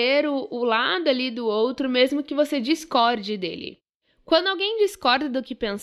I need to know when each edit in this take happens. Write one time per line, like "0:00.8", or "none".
none

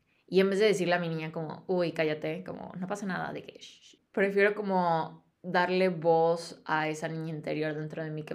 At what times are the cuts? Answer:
none

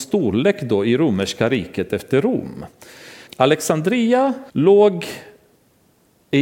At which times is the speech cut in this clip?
0:03.3
0:04.5

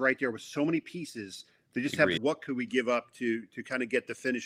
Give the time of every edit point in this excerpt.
0:02.2

